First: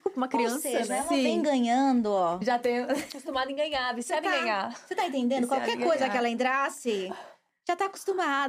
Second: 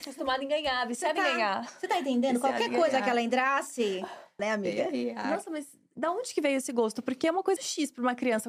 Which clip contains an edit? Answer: second; 2 cuts; at 4.4 s, 7.6 s

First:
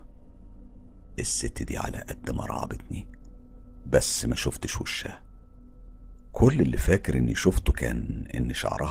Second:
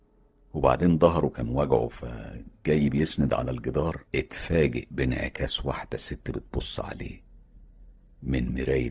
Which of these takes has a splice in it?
second; 1 cut; at 4.1 s

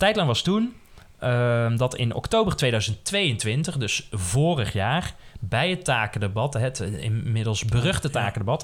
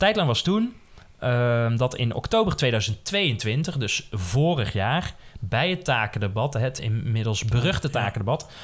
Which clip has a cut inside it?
second; 1 cut; at 6.8 s

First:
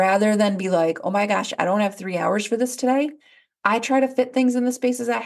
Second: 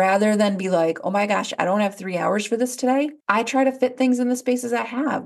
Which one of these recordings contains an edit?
second; 1 cut; at 3.2 s

